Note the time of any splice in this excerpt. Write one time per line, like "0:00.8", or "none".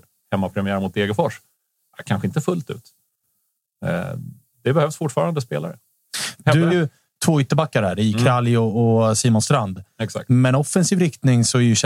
0:06.7